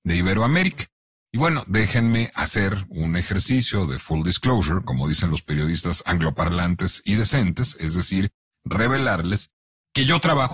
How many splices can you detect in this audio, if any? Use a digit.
0